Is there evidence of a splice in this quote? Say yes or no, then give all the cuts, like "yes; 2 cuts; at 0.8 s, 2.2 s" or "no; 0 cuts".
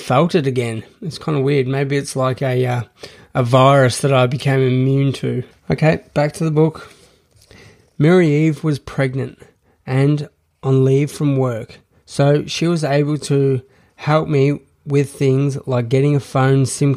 yes; 1 cut; at 5.5 s